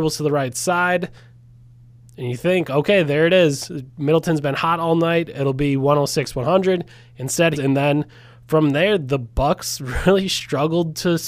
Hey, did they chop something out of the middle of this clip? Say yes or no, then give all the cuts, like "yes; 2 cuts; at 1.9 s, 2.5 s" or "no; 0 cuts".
yes; 1 cut; at 7.6 s